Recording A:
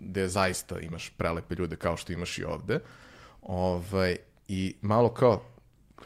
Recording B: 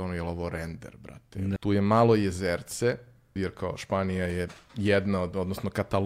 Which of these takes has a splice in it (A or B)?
B